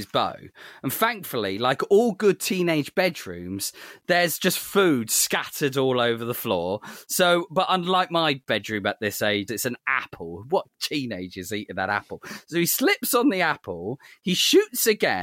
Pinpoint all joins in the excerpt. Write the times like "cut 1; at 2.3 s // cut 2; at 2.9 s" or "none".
cut 1; at 9.5 s